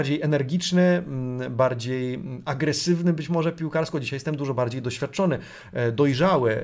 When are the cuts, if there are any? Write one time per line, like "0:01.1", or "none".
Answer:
none